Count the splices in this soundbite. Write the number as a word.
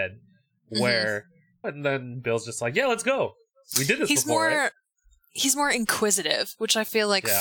one